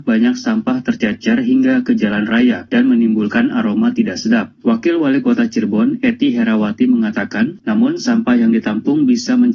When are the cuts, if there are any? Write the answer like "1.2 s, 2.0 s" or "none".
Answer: 7.6 s

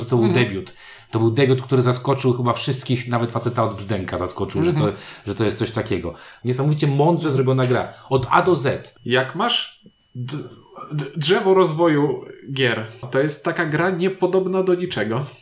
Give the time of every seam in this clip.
6.4 s, 9.0 s, 13.0 s

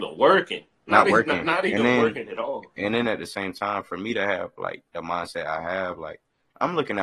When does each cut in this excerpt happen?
none

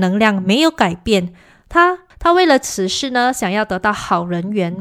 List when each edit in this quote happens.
2.1 s

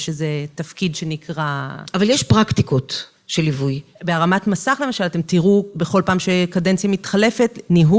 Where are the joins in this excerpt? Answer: none

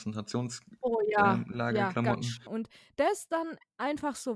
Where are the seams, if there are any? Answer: 2.5 s

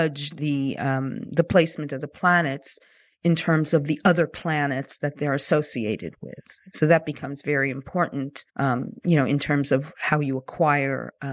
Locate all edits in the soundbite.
8.5 s

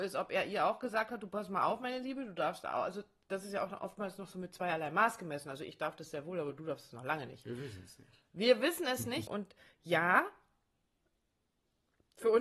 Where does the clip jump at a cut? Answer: 9.3 s

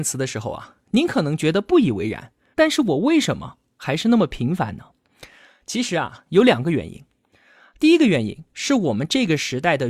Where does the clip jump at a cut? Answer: 2.5 s

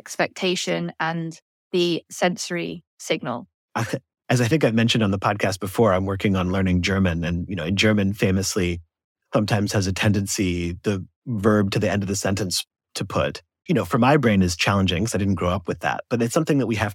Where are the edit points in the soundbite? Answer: 3.6 s, 13.7 s

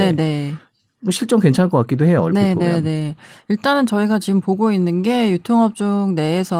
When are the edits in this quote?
none

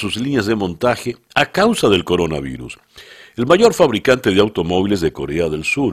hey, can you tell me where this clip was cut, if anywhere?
none

